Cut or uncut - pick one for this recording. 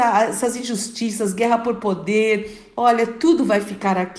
uncut